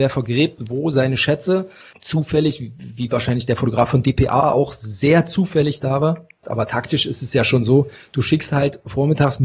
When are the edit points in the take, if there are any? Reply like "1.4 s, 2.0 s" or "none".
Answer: 1.9 s, 6.4 s

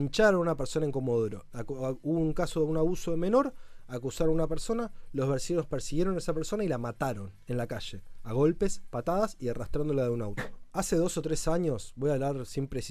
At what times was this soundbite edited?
1.5 s, 10.4 s

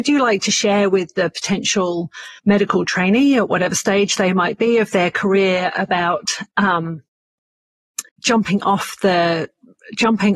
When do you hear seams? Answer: 2.4 s, 8.1 s

